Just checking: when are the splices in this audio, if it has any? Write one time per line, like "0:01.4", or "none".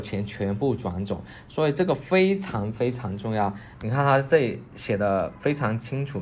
0:03.7